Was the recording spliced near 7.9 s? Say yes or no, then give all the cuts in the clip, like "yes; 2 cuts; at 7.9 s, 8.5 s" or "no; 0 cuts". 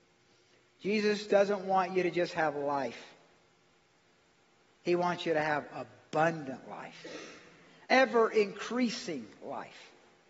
yes; 1 cut; at 7.9 s